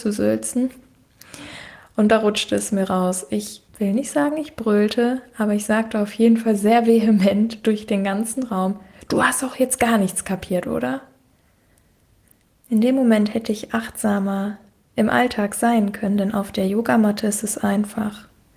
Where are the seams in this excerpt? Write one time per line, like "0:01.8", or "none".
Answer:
0:03.7
0:12.5